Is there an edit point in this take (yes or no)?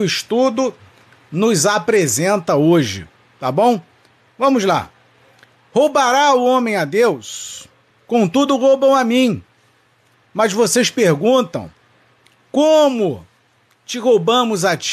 no